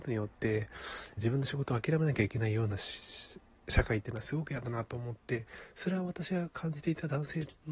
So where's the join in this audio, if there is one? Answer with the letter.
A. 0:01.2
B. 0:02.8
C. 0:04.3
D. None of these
A